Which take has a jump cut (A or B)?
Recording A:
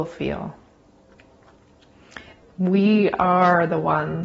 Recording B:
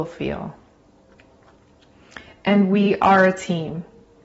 A